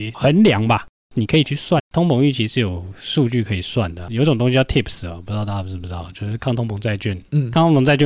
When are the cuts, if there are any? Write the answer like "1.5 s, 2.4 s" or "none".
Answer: 1.8 s